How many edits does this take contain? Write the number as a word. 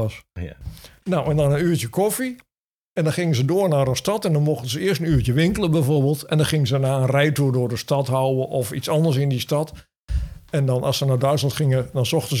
zero